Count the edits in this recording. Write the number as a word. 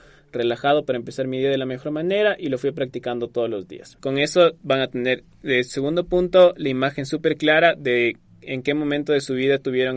one